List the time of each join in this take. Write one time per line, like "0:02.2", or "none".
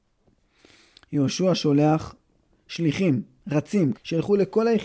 0:03.9